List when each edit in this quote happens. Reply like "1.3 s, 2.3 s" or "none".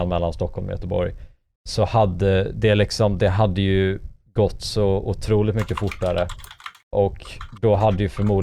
none